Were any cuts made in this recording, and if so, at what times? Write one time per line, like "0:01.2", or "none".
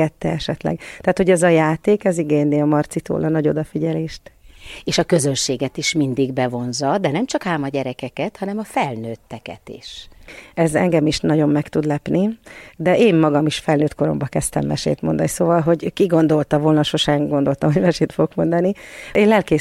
none